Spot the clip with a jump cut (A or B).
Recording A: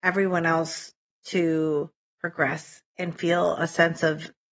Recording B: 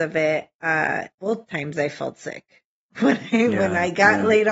B